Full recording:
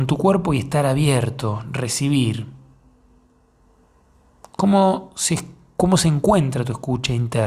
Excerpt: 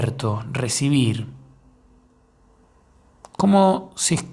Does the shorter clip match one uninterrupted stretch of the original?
yes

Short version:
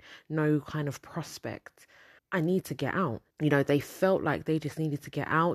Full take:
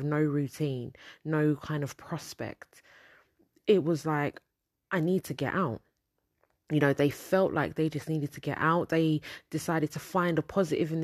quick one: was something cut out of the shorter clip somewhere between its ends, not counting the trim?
yes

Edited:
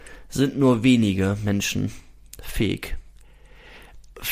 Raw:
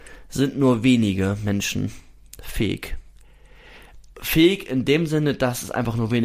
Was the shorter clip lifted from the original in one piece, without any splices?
yes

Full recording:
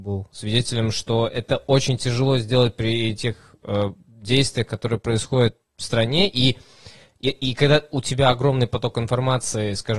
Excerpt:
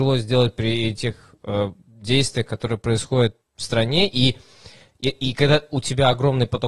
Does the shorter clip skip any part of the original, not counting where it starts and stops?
no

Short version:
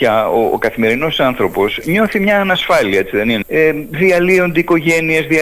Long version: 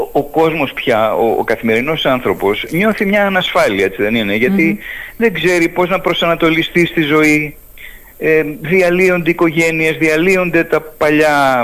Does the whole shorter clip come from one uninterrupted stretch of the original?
no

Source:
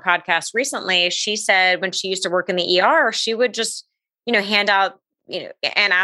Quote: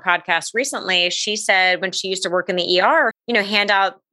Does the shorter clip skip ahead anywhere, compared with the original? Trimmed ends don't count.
yes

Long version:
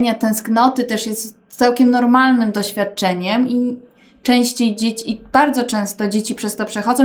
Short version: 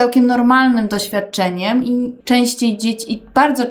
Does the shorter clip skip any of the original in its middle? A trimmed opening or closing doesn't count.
yes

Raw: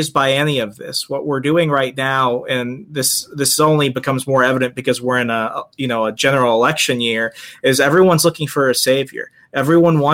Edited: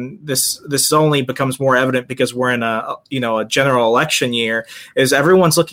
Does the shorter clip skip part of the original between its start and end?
no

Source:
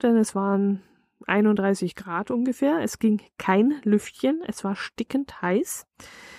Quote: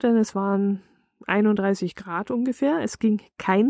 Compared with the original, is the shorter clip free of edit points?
yes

